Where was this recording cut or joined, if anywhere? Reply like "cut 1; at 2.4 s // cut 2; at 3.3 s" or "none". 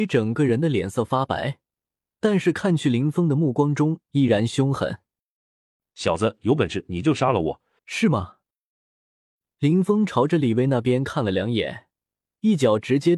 cut 1; at 7.8 s